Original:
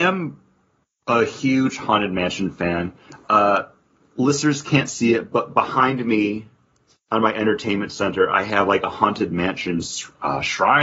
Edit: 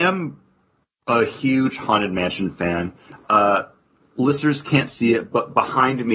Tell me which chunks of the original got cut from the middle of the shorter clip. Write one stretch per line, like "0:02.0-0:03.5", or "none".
none